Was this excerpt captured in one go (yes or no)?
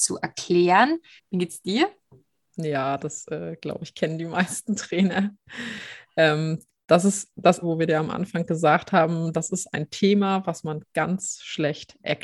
no